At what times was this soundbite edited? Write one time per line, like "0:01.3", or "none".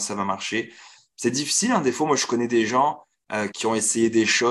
0:03.5

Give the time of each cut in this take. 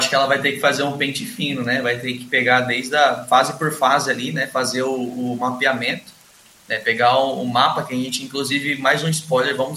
none

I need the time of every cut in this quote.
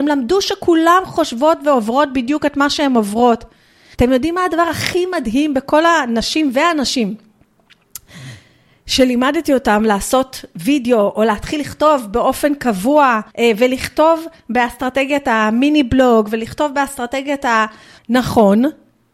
0:03.9
0:13.3
0:18.0

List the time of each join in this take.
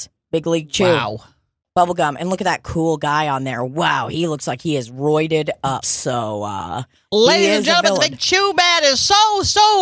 0:05.8

